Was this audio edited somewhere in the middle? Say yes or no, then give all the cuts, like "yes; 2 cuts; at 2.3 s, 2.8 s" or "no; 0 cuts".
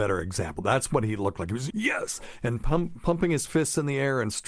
yes; 1 cut; at 1.7 s